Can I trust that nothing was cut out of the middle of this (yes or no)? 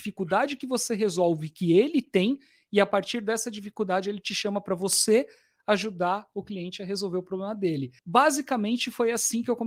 no